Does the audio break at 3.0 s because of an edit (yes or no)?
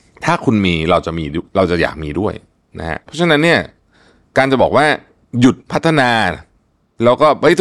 yes